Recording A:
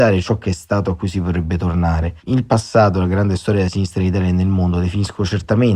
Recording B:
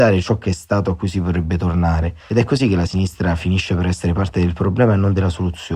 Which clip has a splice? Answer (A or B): A